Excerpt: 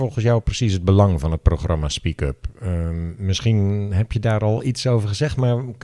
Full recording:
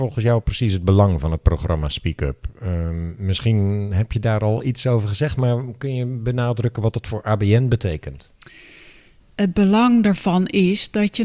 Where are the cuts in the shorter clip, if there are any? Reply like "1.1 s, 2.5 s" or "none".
none